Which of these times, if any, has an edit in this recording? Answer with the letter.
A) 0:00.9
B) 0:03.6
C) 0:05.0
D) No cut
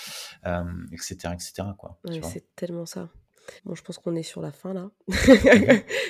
B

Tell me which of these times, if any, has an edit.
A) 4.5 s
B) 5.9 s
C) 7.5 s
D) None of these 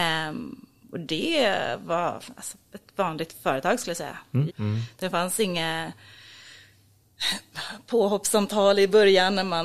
A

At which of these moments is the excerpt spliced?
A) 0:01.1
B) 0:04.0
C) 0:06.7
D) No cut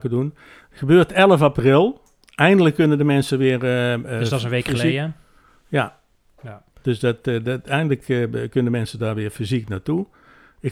C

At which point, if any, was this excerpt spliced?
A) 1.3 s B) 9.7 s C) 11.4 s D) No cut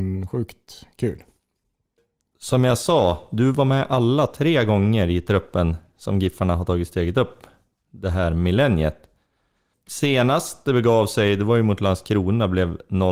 D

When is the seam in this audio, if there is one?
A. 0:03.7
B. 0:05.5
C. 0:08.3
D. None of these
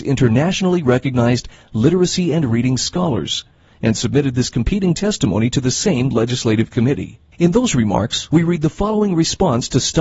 C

